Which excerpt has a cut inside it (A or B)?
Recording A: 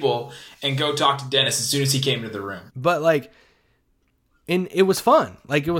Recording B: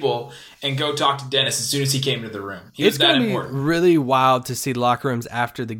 A